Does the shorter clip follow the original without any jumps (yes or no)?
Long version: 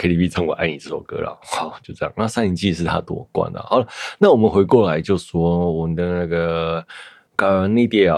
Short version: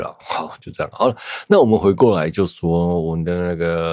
no